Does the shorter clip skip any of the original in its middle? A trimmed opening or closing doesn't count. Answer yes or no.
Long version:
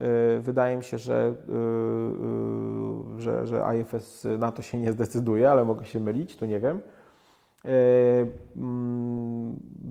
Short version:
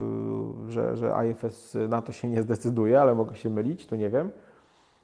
no